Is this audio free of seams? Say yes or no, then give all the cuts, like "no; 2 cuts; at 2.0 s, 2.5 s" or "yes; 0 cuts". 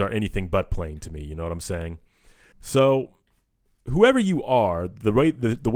no; 1 cut; at 2.5 s